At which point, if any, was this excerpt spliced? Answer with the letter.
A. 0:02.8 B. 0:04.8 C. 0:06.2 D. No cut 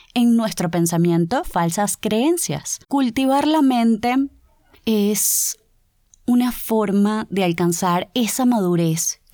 A